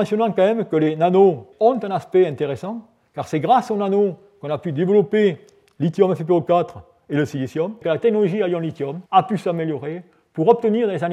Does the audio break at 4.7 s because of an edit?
no; 3 cuts; at 1.5 s, 7.8 s, 9.1 s

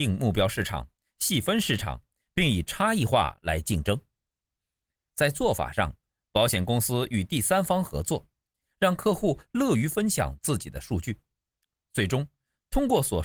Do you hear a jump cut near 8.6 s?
yes; 1 cut; at 8.6 s

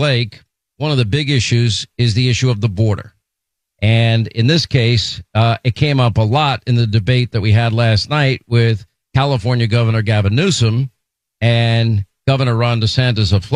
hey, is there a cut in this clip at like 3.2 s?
no; 0 cuts

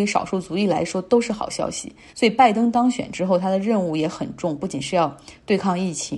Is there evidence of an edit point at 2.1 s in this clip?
yes; 1 cut; at 2.1 s

